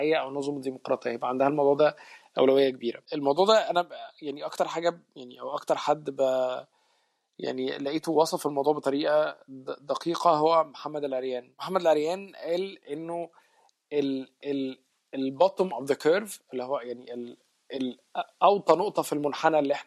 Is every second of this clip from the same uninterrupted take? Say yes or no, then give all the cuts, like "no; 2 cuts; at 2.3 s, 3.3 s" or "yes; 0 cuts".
yes; 0 cuts